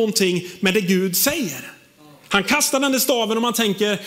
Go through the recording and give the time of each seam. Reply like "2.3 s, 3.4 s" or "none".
none